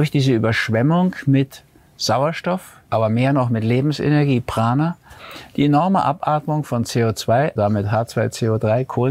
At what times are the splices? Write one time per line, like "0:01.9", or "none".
0:02.8
0:07.6